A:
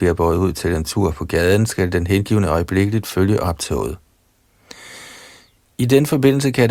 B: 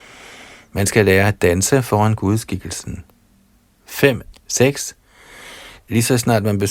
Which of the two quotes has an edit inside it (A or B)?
B